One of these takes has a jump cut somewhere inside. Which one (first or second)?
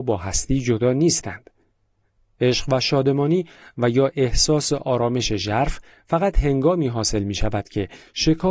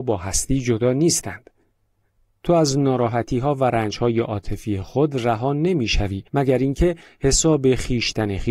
second